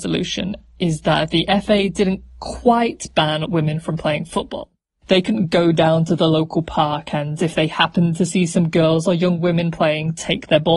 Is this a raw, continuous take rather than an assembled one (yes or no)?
no